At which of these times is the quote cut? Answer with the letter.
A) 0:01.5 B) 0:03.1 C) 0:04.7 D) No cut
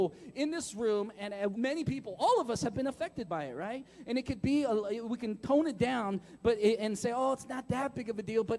A